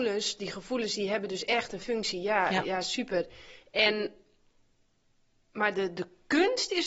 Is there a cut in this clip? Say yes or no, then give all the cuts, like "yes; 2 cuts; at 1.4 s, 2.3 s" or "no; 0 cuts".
no; 0 cuts